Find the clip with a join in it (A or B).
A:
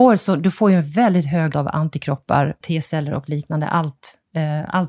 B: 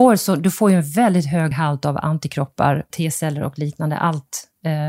A